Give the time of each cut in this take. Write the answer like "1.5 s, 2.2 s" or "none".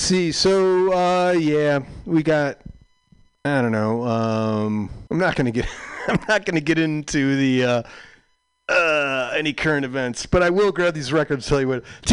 5.1 s

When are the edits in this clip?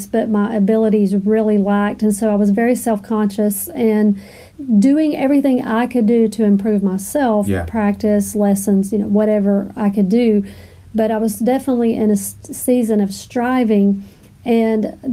none

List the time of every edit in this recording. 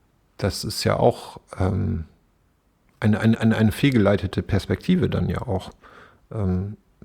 none

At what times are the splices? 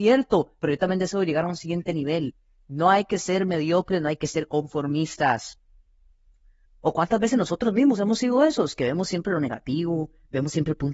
6.7 s

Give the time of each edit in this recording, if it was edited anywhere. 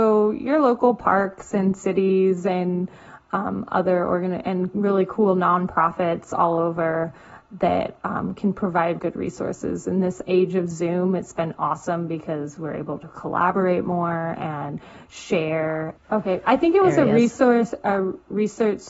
9.0 s, 16.0 s

